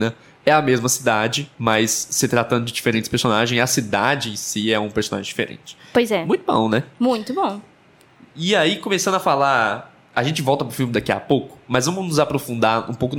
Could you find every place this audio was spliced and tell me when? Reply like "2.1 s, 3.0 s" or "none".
none